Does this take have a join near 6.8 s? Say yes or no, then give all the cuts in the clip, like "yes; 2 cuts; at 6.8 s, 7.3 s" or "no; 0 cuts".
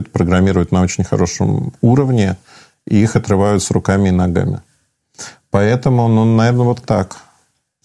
yes; 1 cut; at 6.8 s